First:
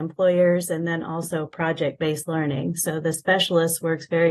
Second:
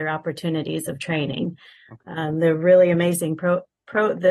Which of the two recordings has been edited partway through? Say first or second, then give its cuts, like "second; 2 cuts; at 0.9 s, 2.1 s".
first; 1 cut; at 2.8 s